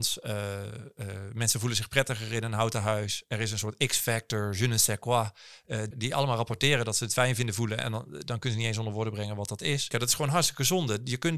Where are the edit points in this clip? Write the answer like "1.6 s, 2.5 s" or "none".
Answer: 5.9 s, 9.9 s